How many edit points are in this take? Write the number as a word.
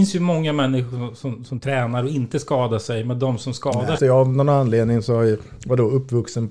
one